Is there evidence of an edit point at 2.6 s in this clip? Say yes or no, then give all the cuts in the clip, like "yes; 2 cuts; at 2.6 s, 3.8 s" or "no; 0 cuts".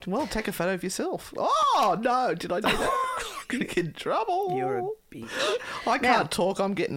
yes; 1 cut; at 2.6 s